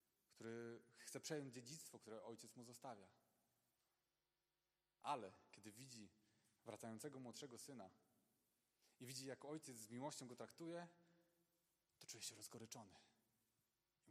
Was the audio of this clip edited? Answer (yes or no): no